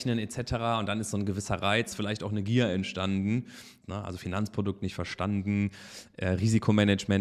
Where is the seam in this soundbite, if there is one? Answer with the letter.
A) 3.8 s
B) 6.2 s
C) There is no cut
A